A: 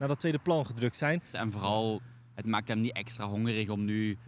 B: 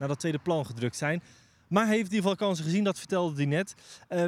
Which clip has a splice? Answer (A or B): A